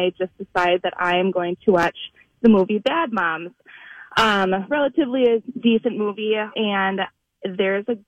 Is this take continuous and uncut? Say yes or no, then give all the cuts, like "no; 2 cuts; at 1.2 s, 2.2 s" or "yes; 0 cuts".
no; 1 cut; at 6.5 s